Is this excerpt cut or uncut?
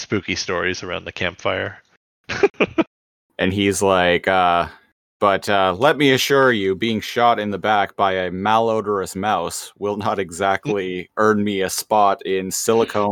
uncut